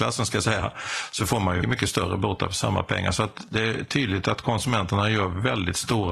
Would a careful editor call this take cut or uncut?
cut